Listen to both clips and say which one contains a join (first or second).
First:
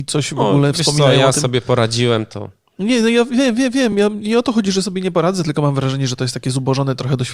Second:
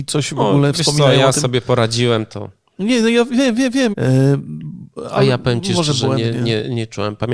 second